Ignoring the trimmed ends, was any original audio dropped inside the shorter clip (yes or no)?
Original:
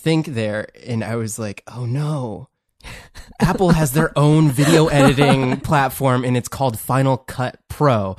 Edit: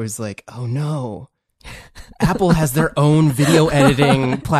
no